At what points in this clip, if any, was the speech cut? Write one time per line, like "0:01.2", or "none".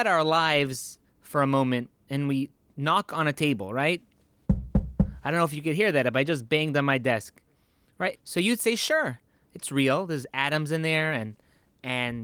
0:08.1